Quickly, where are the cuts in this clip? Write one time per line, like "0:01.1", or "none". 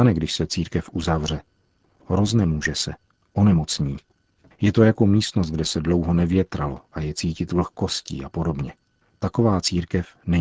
none